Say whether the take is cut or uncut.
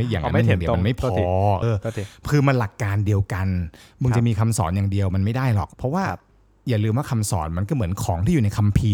cut